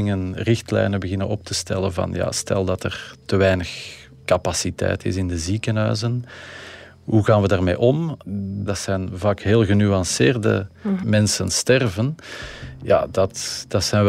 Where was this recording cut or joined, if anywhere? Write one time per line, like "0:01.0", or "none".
0:11.0